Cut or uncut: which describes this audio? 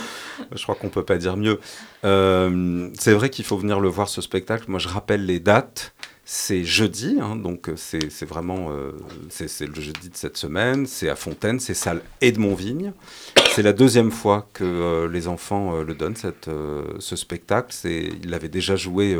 cut